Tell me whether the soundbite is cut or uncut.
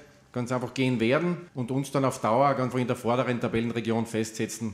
cut